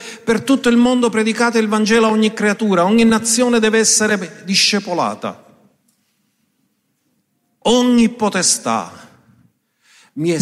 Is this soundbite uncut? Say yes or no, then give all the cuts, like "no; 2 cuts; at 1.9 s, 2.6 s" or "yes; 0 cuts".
yes; 0 cuts